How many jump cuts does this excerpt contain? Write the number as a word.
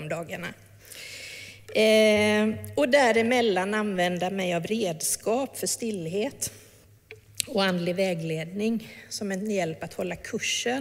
zero